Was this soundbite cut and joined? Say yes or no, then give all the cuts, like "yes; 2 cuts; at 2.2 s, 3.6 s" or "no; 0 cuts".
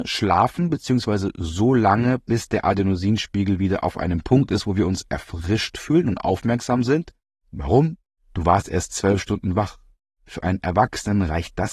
yes; 1 cut; at 7.4 s